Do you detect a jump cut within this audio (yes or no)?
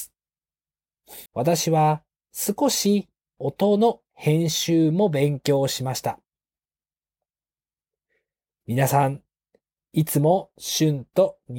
yes